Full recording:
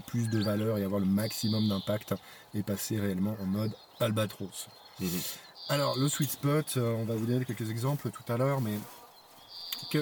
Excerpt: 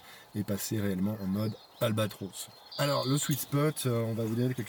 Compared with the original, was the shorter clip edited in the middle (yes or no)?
yes